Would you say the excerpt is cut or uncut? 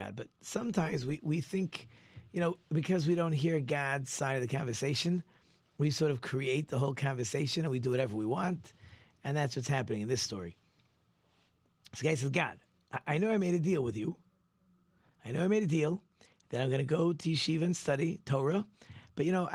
uncut